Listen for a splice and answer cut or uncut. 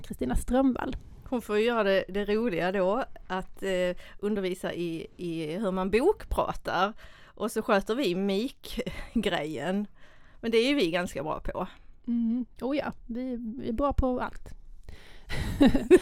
uncut